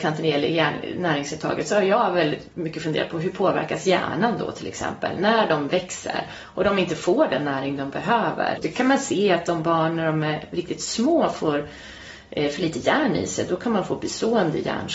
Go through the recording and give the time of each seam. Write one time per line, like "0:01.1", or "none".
0:08.6